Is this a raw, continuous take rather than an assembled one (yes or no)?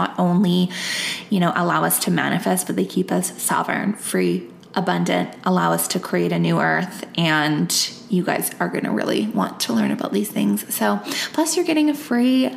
yes